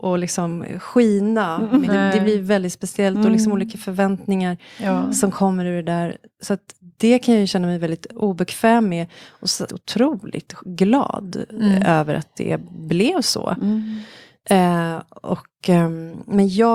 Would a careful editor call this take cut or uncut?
cut